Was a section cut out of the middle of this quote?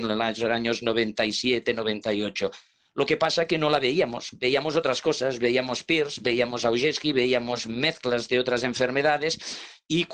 no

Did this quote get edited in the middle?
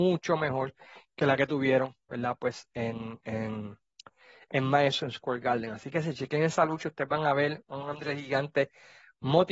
no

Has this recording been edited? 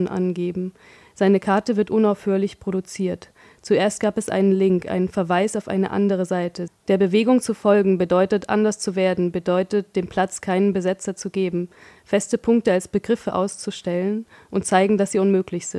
yes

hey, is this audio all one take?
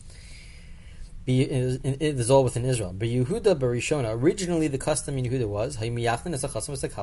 yes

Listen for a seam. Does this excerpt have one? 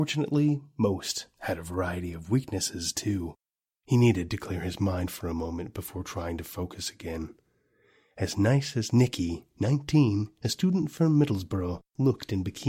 yes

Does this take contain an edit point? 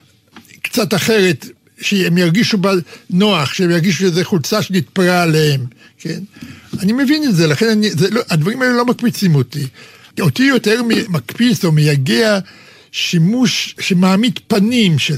no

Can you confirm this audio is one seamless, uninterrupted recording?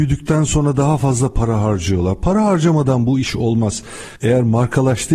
no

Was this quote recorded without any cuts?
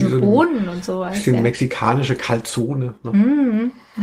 yes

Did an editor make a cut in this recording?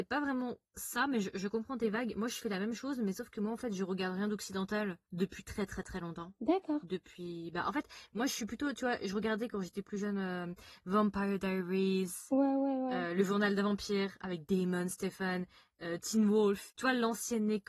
no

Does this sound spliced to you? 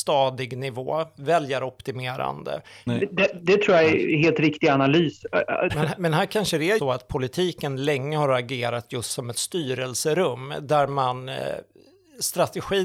yes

